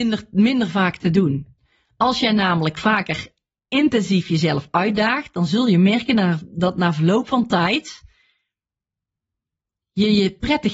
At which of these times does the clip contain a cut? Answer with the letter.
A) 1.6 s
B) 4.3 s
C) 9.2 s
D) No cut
D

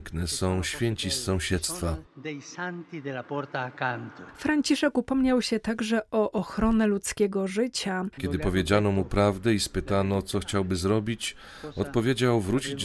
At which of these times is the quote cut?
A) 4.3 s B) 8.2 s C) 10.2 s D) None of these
B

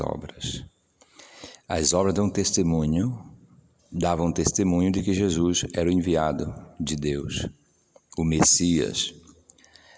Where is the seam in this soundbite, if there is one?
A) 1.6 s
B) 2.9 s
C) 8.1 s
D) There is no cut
D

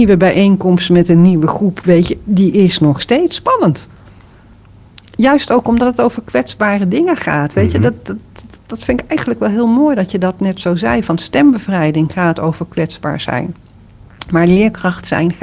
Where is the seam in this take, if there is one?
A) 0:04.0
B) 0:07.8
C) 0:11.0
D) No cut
D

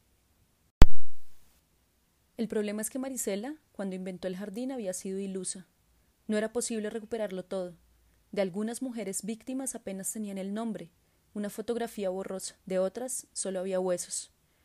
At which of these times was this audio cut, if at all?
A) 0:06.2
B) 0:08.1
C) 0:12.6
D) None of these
C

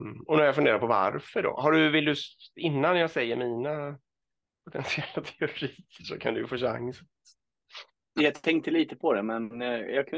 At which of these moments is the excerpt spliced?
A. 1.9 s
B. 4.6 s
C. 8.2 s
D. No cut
C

